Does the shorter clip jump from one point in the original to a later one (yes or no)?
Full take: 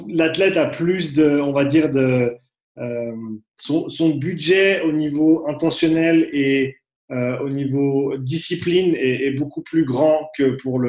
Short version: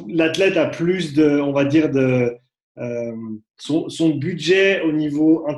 no